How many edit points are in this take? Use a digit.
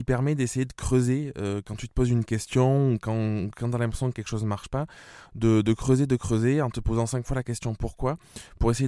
0